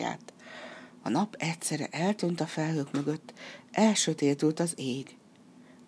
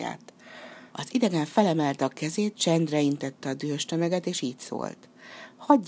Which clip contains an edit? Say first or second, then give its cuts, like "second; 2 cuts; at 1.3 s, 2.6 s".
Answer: second; 1 cut; at 0.9 s